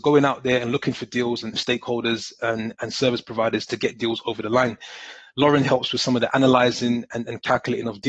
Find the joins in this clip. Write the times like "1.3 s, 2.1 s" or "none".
1.5 s